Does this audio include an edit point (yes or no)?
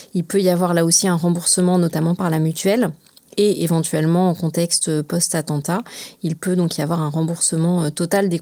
no